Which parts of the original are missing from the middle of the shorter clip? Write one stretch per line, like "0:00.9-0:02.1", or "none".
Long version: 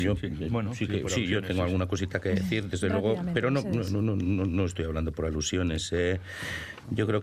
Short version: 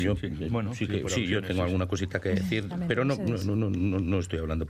0:02.7-0:03.2